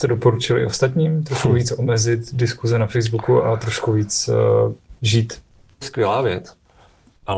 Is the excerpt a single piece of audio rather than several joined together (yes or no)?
no